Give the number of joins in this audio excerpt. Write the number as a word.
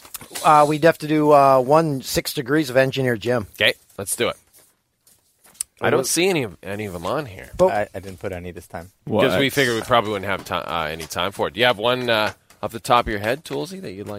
zero